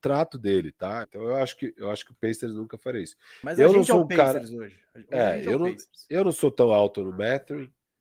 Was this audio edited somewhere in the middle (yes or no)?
yes